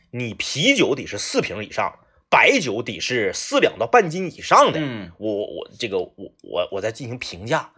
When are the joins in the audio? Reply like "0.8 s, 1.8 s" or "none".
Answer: none